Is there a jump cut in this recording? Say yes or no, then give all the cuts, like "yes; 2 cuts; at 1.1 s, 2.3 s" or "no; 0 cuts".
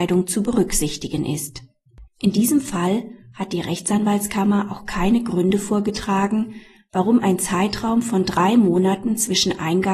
yes; 1 cut; at 2.1 s